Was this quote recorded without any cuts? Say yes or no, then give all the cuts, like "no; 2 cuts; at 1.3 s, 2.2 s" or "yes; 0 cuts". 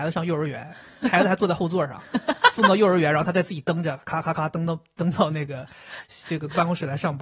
yes; 0 cuts